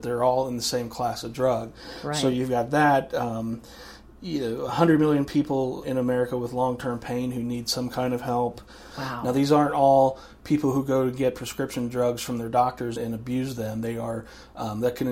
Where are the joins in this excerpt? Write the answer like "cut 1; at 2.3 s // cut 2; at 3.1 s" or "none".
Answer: cut 1; at 5.8 s // cut 2; at 8.9 s // cut 3; at 12.9 s